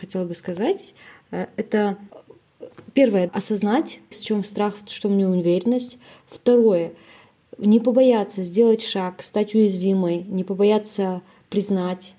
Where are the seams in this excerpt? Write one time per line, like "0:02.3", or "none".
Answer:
0:04.1